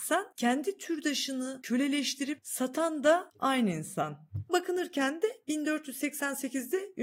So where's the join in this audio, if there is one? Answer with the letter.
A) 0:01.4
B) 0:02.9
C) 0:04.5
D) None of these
C